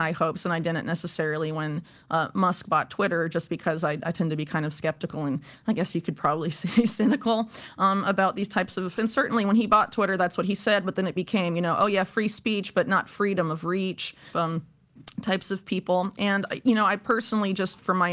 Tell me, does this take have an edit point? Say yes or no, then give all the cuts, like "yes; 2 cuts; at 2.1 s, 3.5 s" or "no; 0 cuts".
yes; 2 cuts; at 9.0 s, 14.3 s